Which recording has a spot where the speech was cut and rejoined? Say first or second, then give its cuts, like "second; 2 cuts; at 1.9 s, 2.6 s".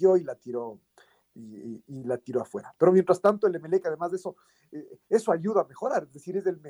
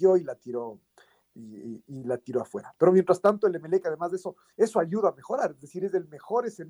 second; 1 cut; at 4.5 s